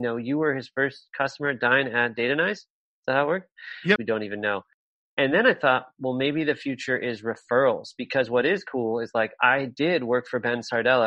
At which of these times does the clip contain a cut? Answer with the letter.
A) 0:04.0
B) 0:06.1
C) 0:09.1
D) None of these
A